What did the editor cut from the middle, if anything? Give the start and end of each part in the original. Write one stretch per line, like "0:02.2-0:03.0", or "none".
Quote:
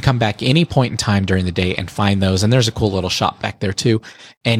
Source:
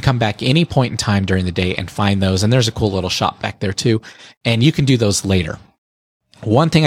none